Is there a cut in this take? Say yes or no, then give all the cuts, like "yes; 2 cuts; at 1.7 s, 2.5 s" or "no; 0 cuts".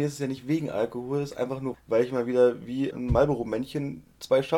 yes; 2 cuts; at 1.7 s, 2.9 s